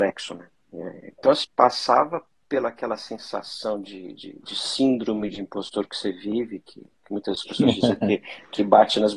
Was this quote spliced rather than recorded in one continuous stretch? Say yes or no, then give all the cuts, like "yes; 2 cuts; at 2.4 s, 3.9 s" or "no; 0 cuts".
yes; 1 cut; at 1.4 s